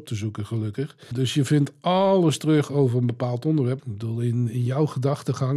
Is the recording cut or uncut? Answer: cut